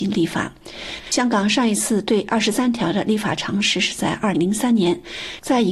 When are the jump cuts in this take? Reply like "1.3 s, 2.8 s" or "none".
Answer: 4.3 s